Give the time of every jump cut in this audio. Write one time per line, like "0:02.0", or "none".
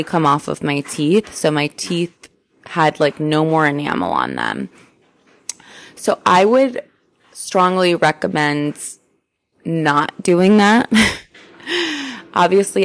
none